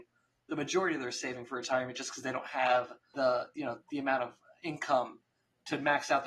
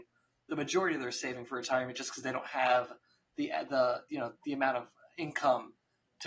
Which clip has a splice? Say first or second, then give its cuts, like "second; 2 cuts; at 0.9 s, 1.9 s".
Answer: first; 1 cut; at 3.1 s